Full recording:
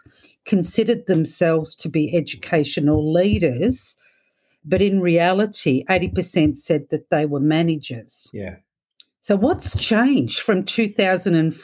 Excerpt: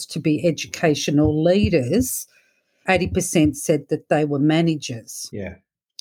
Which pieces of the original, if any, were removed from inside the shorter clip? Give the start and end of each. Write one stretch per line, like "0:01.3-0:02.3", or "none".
0:04.5-0:05.9